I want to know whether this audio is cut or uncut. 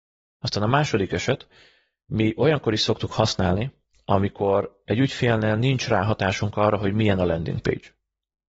uncut